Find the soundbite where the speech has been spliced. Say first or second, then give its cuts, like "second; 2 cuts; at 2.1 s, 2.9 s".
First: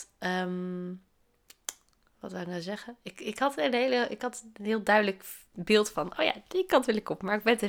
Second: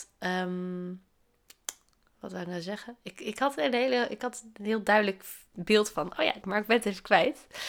second; 1 cut; at 6.4 s